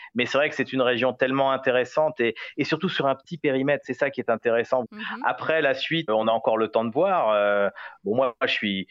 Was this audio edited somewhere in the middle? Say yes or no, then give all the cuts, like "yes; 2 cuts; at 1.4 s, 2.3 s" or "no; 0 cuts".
yes; 2 cuts; at 4.8 s, 6.1 s